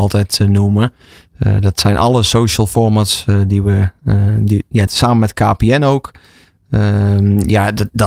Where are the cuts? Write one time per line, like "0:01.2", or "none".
0:04.9